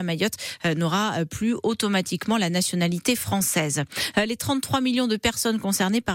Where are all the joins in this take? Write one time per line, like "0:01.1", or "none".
none

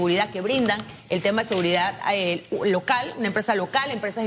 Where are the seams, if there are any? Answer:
none

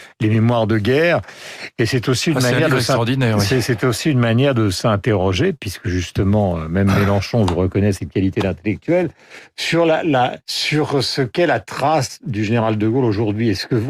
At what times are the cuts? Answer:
0:10.4

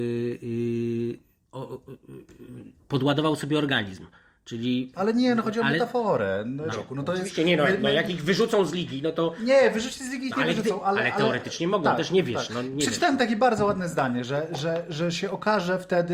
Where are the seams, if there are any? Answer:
0:06.7

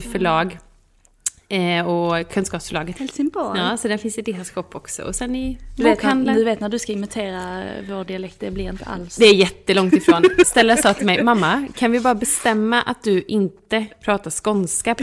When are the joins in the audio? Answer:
0:03.0
0:10.4

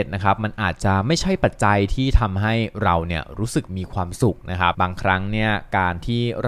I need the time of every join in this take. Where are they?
0:04.7

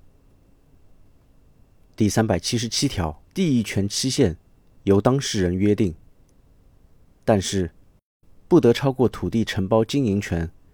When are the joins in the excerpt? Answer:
0:03.3

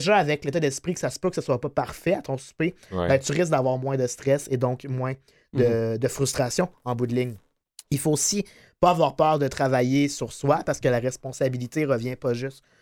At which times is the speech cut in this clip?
none

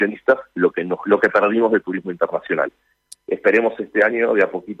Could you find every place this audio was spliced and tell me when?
0:03.2

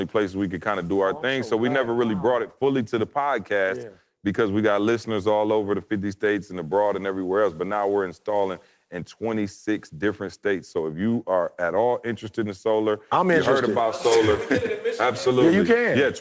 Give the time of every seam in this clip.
none

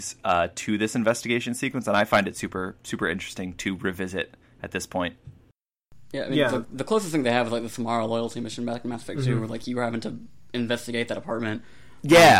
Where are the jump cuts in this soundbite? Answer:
0:06.6

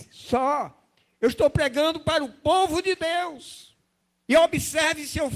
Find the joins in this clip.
none

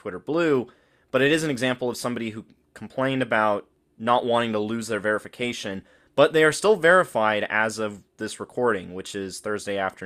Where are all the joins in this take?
none

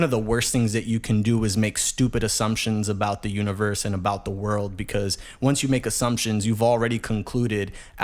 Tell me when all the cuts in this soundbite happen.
none

